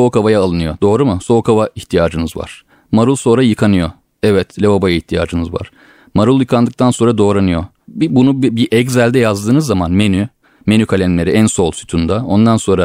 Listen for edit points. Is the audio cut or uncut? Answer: uncut